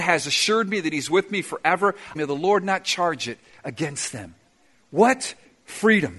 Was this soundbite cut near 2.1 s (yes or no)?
yes